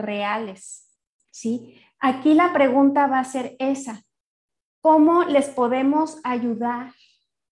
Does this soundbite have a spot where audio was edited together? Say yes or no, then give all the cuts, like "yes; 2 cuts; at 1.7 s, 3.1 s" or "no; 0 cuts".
no; 0 cuts